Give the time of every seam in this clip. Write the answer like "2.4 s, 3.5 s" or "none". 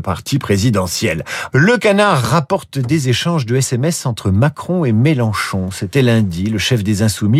1.5 s